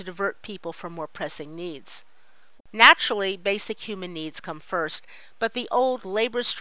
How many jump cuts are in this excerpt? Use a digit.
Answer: 1